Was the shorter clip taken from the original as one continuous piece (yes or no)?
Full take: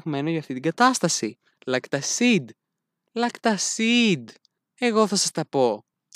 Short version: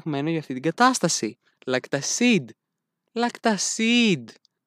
yes